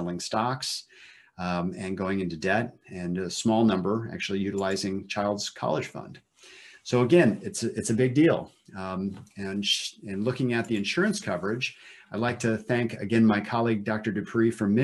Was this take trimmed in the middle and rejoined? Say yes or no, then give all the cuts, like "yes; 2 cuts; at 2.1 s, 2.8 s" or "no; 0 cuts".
no; 0 cuts